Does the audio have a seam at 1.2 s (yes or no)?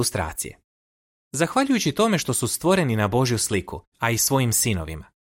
no